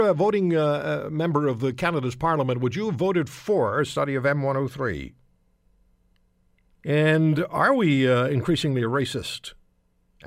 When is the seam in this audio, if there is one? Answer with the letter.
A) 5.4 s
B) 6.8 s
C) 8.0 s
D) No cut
B